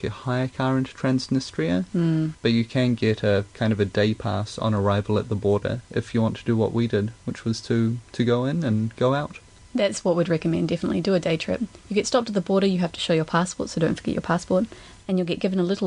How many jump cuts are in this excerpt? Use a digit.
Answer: 1